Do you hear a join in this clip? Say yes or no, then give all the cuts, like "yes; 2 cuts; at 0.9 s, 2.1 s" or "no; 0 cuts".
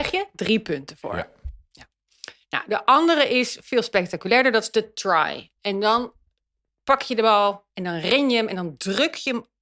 no; 0 cuts